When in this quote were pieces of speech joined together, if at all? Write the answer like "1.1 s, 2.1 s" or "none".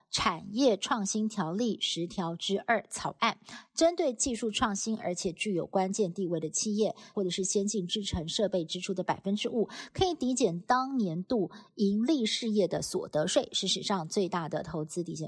7.1 s